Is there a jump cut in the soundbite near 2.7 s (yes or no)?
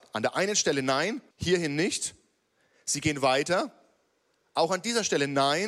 no